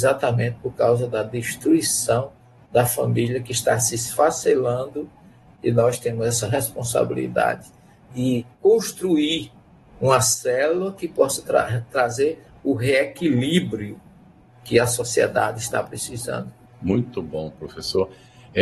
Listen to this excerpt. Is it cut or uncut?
cut